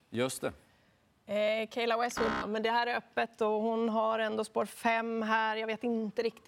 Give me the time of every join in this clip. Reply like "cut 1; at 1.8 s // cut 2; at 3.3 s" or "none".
cut 1; at 2.4 s